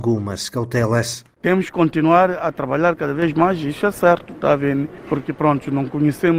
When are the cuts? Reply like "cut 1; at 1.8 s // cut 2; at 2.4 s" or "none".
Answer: none